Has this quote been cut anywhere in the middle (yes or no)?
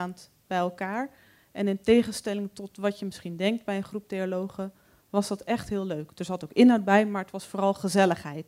no